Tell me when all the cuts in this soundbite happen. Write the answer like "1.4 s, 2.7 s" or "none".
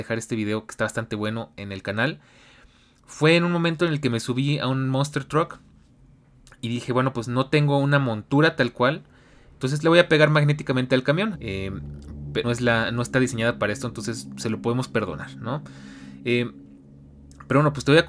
11.3 s, 12.4 s